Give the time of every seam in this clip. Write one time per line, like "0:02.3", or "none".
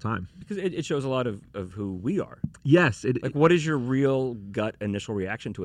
none